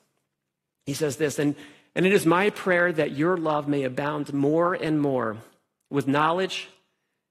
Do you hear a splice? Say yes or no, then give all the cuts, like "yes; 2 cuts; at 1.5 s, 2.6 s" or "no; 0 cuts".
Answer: no; 0 cuts